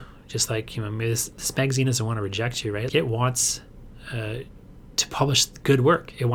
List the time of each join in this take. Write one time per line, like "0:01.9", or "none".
0:02.9